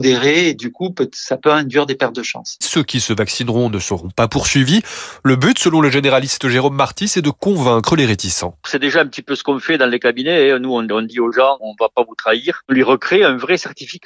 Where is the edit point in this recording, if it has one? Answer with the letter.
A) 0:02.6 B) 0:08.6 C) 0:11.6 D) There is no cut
A